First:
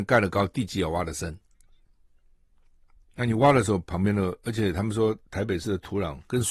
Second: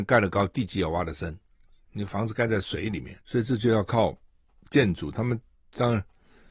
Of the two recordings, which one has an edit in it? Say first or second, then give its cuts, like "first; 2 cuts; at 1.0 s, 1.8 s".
second; 2 cuts; at 1.9 s, 3.2 s